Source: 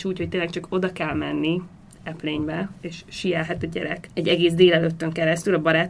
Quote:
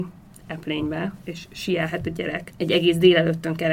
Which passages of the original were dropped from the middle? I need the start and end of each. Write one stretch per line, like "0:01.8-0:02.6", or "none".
none